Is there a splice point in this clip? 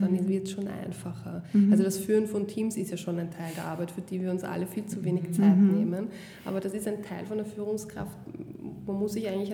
no; 0 cuts

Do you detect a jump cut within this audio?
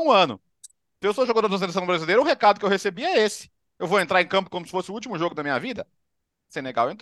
no; 0 cuts

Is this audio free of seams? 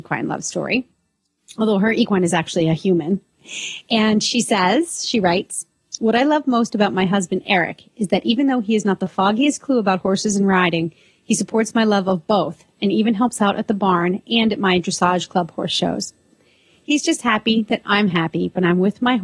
yes; 0 cuts

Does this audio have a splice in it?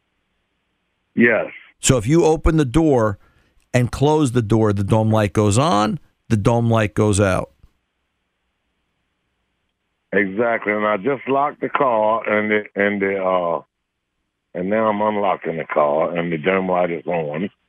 no; 0 cuts

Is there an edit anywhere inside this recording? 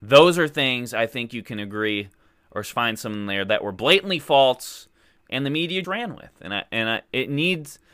yes; 1 cut; at 5.8 s

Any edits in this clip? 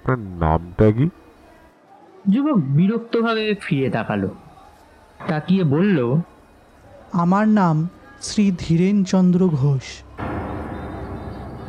no; 0 cuts

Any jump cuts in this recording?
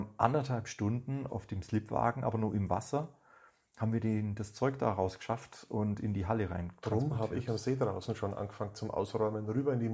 yes; 1 cut; at 1.3 s

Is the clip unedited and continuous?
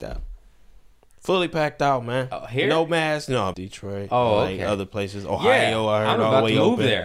no; 1 cut; at 3.5 s

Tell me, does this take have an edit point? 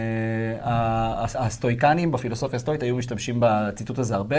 no; 0 cuts

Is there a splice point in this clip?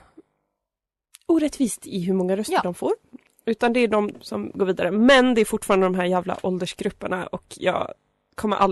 yes; 1 cut; at 4.1 s

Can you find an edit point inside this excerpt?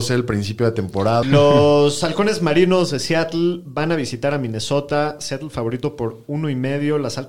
yes; 1 cut; at 1.2 s

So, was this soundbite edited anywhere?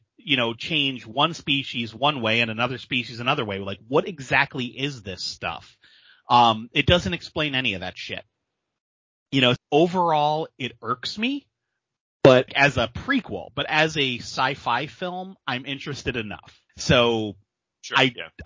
yes; 3 cuts; at 9.6 s, 12.5 s, 16.7 s

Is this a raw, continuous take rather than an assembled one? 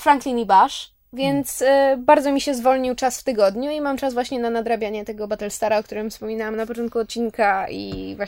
yes; 0 cuts

